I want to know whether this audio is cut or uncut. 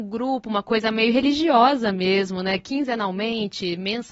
uncut